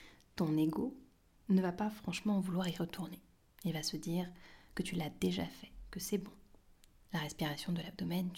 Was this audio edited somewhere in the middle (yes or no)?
no